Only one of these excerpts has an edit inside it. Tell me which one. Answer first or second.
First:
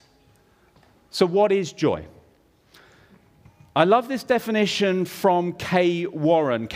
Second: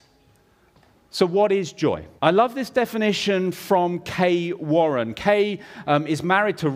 second